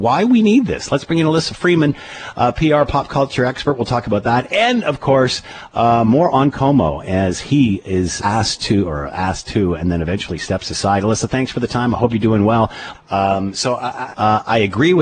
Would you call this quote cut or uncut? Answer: cut